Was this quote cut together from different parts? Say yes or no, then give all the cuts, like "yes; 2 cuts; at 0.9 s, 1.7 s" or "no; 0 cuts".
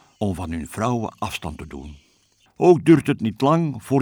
yes; 1 cut; at 2.5 s